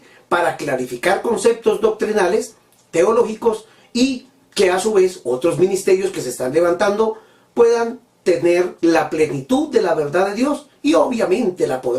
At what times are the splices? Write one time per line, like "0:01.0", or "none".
0:08.8